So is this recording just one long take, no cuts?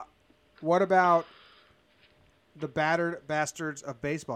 yes; 0 cuts

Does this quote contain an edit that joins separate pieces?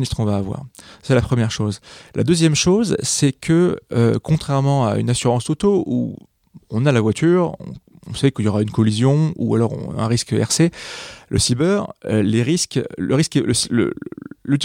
no; 0 cuts

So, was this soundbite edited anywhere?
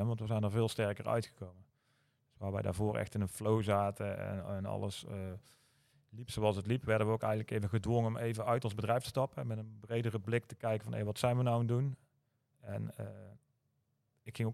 no; 0 cuts

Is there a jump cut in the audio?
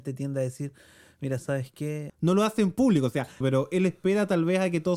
yes; 2 cuts; at 2.1 s, 3.4 s

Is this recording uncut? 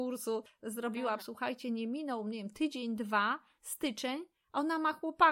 no; 1 cut; at 1.2 s

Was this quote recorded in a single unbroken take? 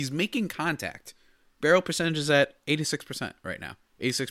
yes; 0 cuts

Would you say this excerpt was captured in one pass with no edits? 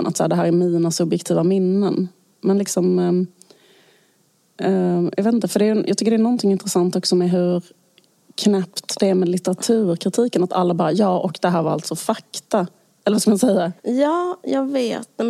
no; 1 cut; at 13.8 s

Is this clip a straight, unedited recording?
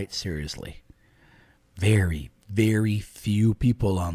yes; 0 cuts

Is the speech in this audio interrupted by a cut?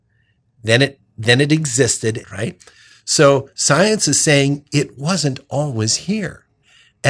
yes; 1 cut; at 2.2 s

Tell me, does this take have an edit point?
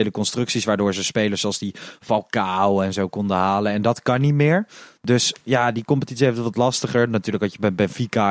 no; 0 cuts

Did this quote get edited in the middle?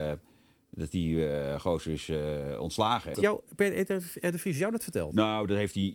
yes; 1 cut; at 3.1 s

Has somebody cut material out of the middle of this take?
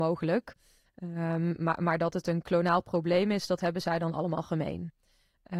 no; 0 cuts

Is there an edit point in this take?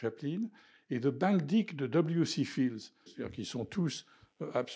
yes; 1 cut; at 3.1 s

